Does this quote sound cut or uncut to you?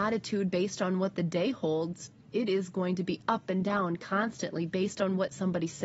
uncut